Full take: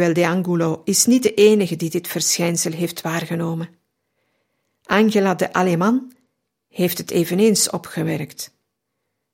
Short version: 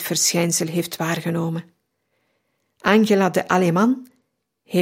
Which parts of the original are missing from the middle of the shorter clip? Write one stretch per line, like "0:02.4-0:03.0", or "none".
none